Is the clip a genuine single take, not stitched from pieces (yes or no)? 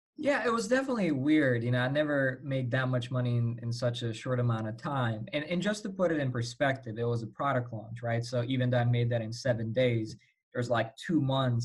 yes